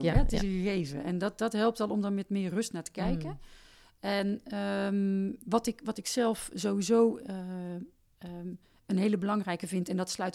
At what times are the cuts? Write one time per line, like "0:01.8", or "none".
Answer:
none